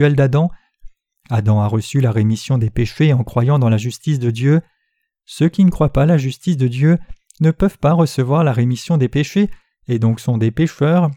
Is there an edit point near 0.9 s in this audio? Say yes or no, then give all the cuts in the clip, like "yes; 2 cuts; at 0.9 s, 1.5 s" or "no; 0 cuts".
no; 0 cuts